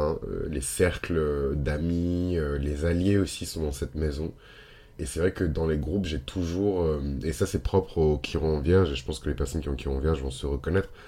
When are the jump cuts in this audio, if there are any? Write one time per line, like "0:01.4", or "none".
0:05.0